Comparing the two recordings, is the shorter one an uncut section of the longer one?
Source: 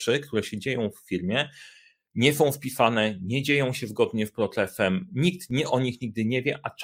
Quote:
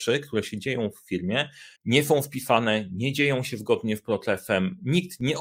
no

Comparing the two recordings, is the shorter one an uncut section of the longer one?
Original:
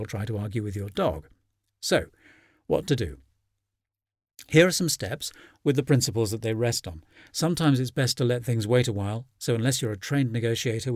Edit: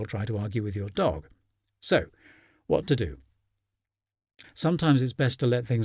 no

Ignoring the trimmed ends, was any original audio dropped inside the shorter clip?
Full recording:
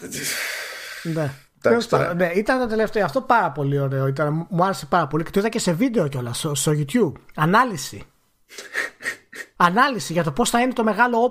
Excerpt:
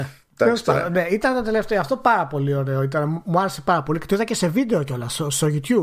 no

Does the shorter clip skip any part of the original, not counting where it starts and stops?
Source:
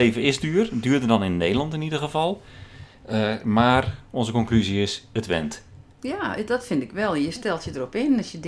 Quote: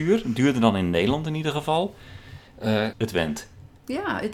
yes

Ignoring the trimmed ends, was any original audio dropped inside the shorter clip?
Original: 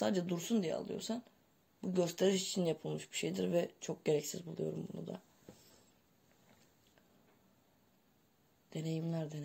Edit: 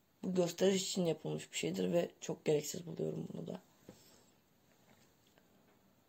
no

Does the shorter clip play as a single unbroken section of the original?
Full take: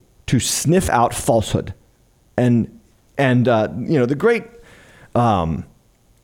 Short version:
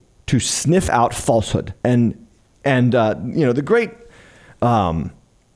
no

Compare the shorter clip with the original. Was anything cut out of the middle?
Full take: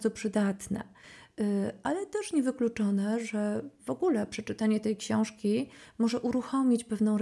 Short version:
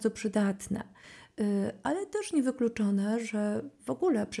no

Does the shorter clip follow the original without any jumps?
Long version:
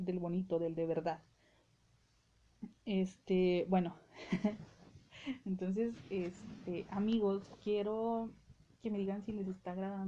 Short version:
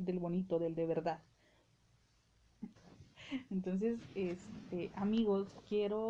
no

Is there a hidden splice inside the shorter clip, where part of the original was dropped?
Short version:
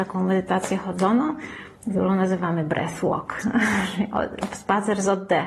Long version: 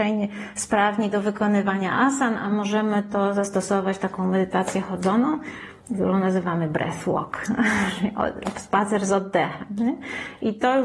no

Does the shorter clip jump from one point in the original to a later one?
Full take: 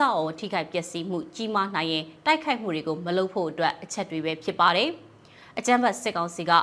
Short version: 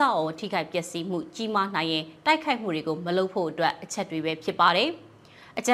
no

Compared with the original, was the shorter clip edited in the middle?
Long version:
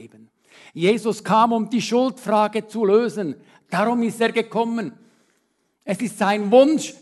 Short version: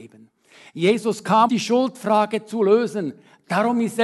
yes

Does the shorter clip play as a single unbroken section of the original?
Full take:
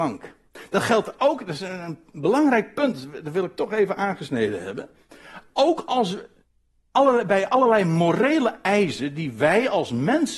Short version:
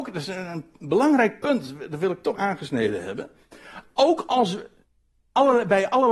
no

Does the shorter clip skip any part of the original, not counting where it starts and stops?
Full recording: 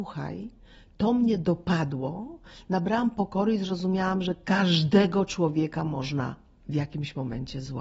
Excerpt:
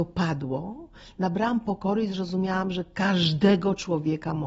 no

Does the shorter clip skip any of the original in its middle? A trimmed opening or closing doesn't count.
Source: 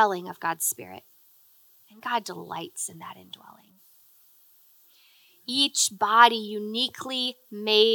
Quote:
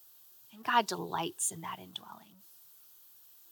no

